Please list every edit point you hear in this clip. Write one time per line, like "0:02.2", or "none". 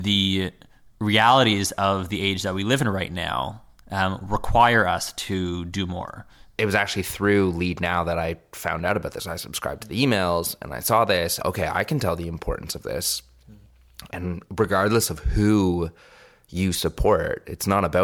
0:06.6
0:11.4
0:14.1